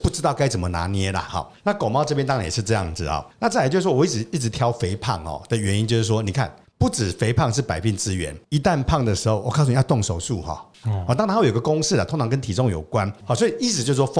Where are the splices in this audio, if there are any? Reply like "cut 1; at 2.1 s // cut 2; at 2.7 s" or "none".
cut 1; at 1.3 s // cut 2; at 10.8 s // cut 3; at 13.2 s